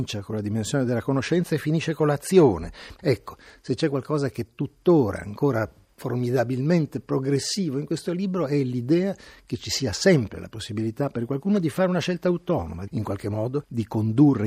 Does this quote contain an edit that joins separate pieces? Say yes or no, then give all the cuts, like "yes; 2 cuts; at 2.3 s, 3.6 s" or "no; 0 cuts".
yes; 2 cuts; at 3.0 s, 12.9 s